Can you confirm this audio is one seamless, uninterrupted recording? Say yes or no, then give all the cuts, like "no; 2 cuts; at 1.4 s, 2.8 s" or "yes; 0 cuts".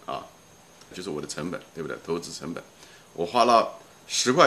no; 1 cut; at 0.9 s